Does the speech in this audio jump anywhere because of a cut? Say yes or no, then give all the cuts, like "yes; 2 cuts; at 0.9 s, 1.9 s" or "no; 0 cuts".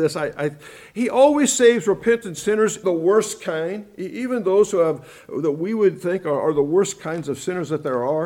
yes; 1 cut; at 2.8 s